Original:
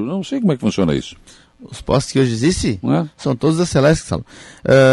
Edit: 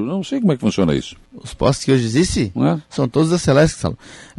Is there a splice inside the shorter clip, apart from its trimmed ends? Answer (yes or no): yes